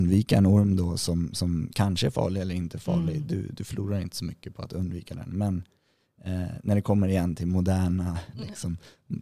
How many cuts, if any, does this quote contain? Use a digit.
0